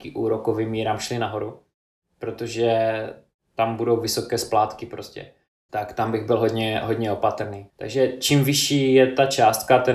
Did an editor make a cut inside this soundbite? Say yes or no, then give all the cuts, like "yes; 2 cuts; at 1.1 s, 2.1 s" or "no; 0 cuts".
yes; 3 cuts; at 2.0 s, 5.7 s, 7.7 s